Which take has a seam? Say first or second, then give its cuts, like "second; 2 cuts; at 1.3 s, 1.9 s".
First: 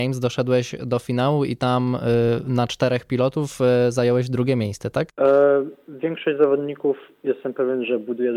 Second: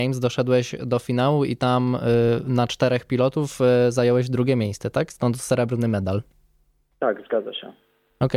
first; 1 cut; at 5.1 s